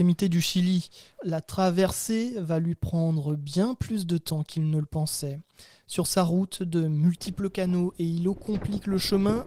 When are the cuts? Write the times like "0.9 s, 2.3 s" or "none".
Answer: 1.2 s